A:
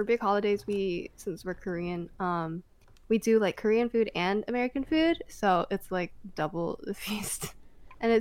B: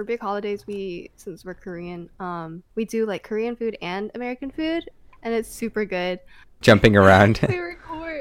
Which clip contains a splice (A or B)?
B